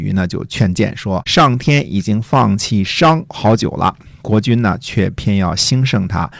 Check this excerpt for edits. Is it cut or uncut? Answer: cut